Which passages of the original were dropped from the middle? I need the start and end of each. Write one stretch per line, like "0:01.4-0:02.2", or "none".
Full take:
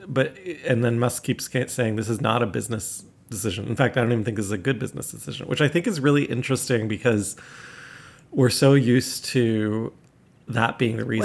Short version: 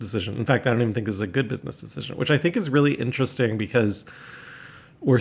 none